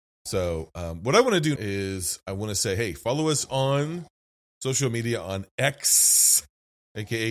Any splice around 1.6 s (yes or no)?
yes